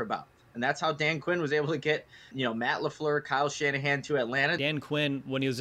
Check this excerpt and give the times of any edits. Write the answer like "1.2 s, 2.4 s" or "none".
2.3 s, 4.6 s